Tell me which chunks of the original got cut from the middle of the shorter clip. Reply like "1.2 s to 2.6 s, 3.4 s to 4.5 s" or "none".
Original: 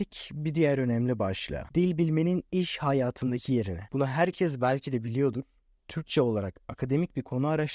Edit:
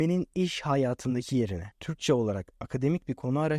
3.9 s to 5.8 s